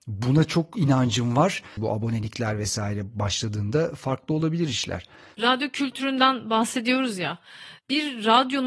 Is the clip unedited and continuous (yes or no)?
no